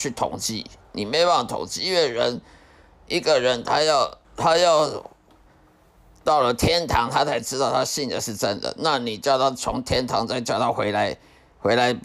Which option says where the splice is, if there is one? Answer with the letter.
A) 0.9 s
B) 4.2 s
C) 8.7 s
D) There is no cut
B